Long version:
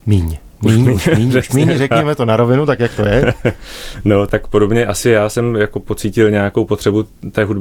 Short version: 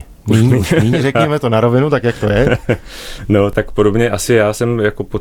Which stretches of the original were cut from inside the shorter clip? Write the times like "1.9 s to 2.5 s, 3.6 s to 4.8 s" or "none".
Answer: 1.3 s to 1.7 s